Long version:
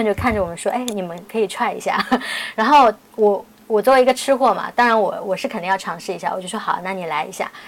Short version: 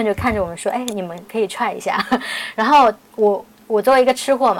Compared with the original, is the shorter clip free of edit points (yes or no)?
yes